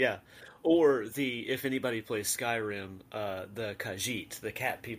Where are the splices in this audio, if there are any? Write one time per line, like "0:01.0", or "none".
none